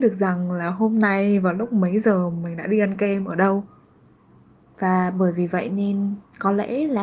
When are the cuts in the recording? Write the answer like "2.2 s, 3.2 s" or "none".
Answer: 4.7 s